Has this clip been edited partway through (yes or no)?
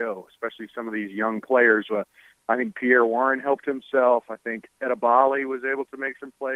no